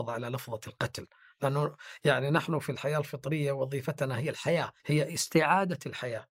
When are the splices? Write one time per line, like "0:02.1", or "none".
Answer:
0:04.8